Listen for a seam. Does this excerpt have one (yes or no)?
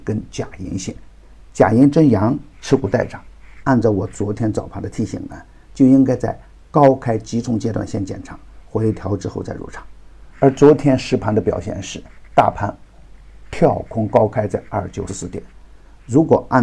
yes